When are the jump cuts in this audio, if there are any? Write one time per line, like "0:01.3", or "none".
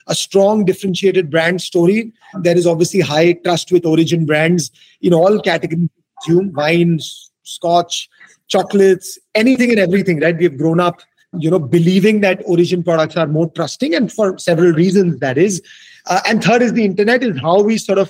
0:11.3